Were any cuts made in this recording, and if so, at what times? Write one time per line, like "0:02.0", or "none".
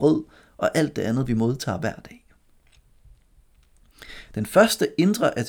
0:04.3

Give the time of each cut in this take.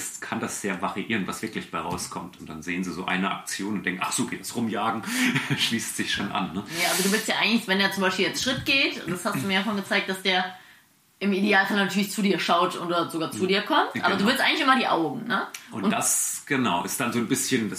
0:02.4

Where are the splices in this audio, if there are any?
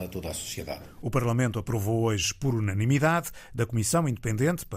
0:03.5

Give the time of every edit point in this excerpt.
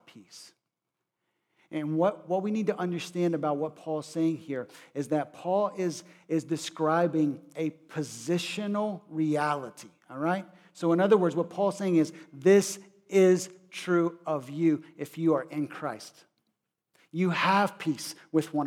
none

